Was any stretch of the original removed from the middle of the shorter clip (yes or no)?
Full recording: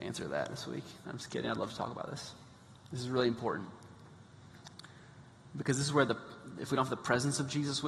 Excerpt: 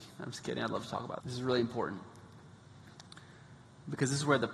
yes